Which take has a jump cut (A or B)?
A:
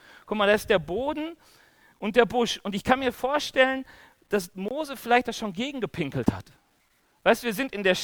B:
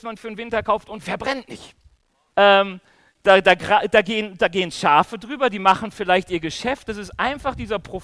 B